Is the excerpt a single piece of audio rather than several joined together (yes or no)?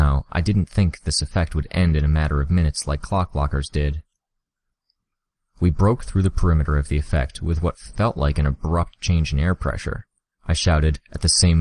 no